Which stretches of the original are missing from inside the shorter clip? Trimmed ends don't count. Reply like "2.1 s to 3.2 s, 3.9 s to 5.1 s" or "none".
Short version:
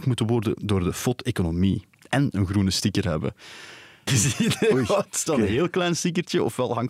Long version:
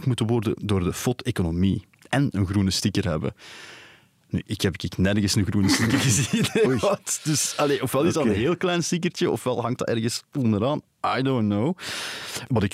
4.1 s to 6.0 s, 7.2 s to 8.1 s